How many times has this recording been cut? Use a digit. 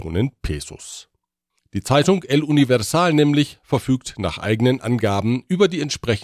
1